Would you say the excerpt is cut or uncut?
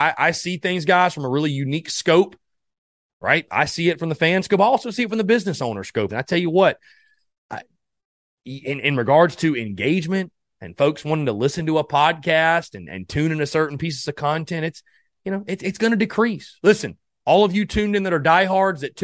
cut